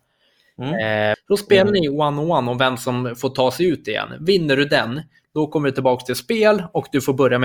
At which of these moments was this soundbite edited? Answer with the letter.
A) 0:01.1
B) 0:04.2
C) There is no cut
A